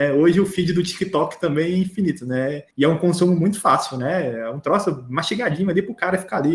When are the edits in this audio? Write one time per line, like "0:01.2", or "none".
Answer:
none